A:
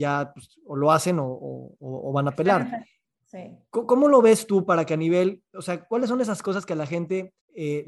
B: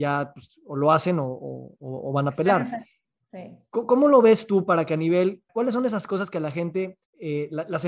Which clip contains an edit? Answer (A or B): B